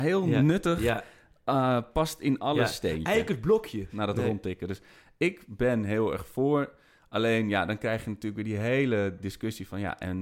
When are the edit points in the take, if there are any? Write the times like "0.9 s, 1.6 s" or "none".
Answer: 3.9 s